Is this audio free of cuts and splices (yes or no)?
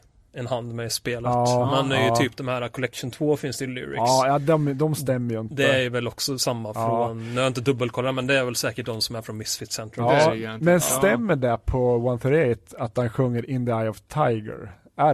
yes